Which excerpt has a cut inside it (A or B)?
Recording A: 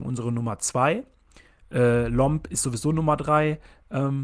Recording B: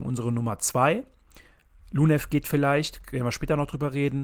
A